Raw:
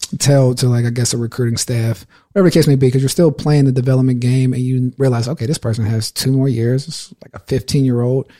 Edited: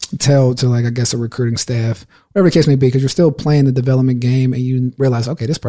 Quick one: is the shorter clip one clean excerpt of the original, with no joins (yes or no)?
yes